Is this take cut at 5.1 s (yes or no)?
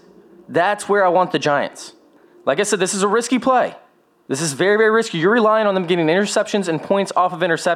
no